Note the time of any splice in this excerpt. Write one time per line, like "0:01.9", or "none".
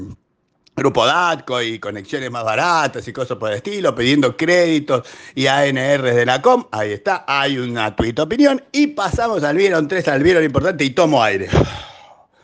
none